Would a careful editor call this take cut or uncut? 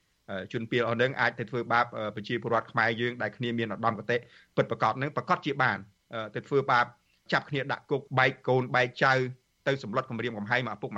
cut